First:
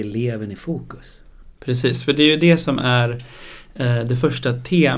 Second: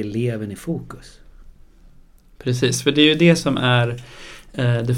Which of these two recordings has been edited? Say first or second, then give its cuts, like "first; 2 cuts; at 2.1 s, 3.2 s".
first; 1 cut; at 1.6 s